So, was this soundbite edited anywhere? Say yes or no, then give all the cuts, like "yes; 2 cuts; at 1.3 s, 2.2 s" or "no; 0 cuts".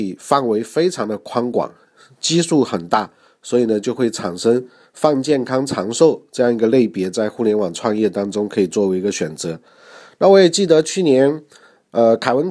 no; 0 cuts